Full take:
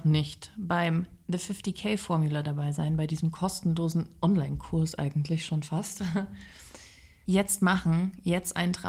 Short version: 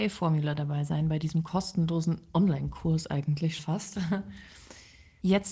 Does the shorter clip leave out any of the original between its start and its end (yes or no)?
yes